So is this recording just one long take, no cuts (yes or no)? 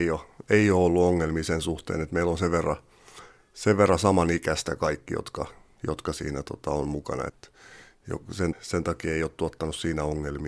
no